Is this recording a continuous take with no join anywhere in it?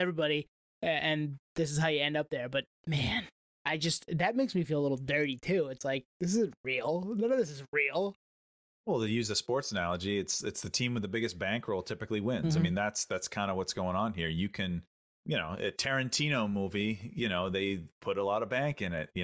yes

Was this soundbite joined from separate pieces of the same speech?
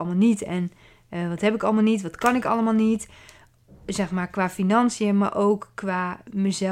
no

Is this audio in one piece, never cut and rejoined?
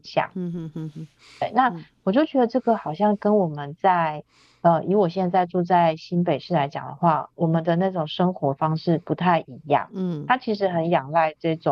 yes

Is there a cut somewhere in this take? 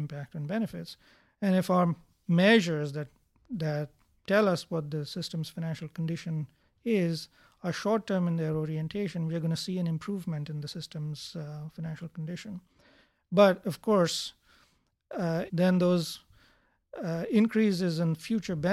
yes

